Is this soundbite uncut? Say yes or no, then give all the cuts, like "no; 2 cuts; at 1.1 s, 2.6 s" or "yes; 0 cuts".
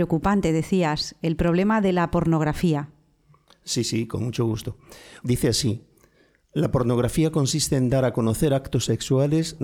no; 2 cuts; at 3.5 s, 5.2 s